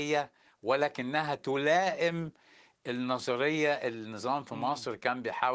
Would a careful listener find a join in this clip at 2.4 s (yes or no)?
no